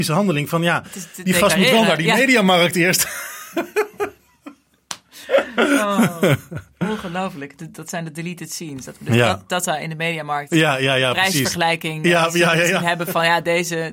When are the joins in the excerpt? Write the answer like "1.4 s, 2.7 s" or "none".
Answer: none